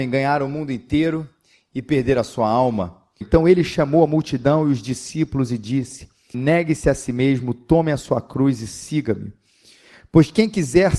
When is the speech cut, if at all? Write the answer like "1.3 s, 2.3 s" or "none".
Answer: 3.2 s, 6.3 s